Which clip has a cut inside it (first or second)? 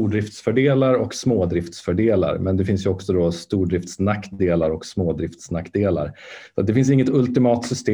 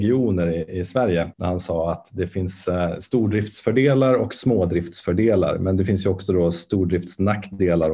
second